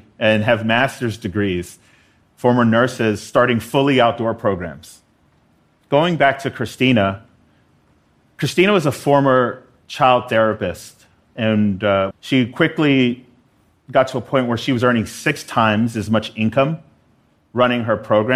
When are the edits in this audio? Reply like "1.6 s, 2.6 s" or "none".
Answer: 12.1 s